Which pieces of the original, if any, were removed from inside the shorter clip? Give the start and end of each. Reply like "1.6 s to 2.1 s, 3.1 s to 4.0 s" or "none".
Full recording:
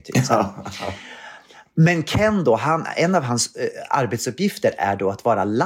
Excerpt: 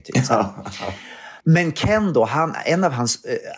1.4 s to 1.7 s

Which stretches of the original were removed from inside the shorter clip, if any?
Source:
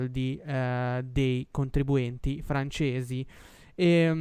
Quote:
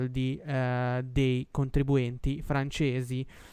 none

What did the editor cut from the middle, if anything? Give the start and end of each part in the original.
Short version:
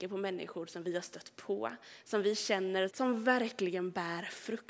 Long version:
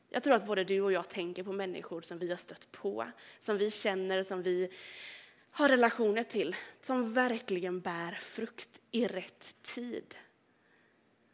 4.2 s to 6.8 s

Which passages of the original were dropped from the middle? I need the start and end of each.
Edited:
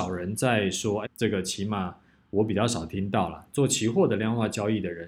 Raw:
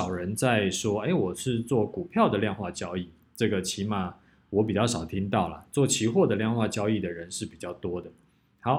1.1 s to 3.2 s

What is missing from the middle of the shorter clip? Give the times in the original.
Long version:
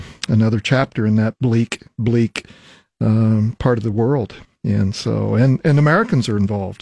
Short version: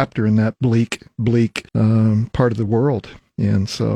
2.5 s to 2.9 s

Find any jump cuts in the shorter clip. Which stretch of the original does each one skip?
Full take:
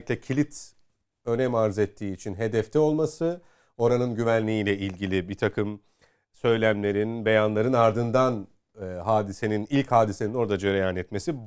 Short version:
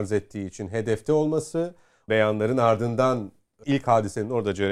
3.7 s to 7.2 s, 8.8 s to 9.7 s

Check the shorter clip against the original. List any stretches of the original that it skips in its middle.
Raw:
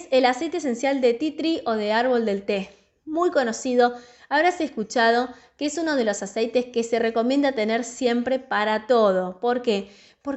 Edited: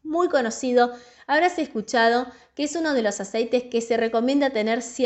none

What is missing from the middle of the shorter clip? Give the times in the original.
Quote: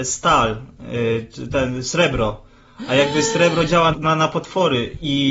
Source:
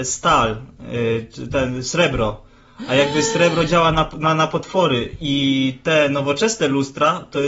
3.9 s to 4.1 s

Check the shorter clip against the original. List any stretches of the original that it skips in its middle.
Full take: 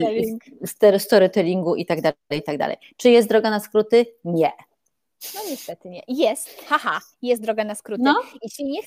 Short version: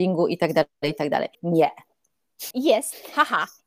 2.8 s to 4.2 s, 5.3 s to 6.0 s

